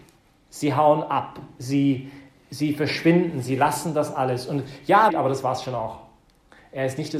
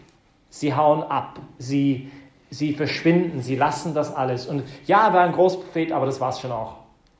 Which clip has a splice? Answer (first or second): first